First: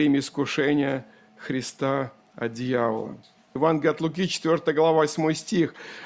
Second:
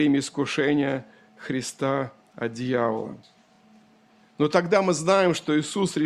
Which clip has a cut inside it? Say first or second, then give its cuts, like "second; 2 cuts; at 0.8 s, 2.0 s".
first; 1 cut; at 3.6 s